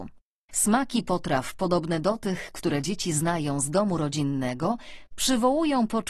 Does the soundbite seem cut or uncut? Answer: uncut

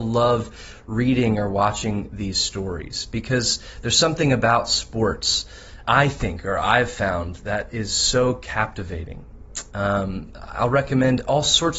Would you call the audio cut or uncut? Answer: cut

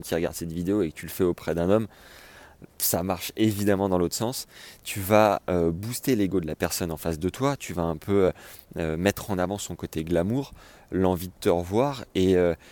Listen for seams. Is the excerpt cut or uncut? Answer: uncut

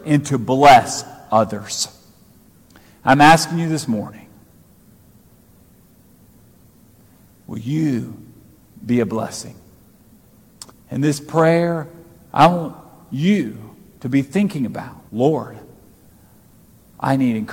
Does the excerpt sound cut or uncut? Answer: cut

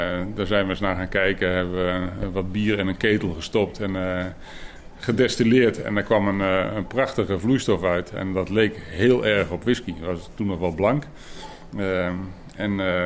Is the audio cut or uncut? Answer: uncut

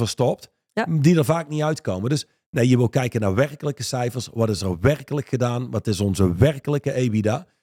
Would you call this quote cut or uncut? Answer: uncut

